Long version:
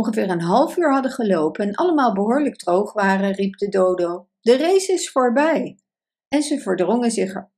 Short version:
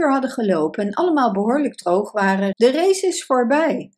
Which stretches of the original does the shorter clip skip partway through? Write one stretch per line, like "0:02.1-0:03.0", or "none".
0:03.3-0:04.4